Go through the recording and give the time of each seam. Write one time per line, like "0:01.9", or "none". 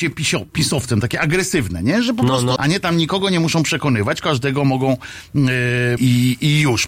0:02.6
0:06.0